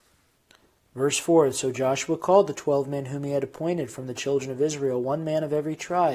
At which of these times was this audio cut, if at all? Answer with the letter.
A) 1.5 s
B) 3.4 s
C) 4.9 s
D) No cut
D